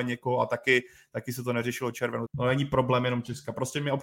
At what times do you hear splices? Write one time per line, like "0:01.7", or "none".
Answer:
0:02.3